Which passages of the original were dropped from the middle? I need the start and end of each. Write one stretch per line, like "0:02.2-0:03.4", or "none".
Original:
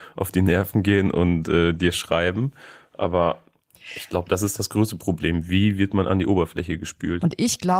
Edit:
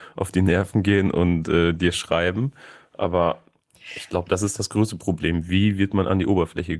none